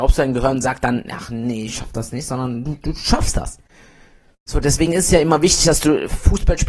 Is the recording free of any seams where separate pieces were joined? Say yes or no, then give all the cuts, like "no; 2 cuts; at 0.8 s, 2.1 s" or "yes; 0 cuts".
yes; 0 cuts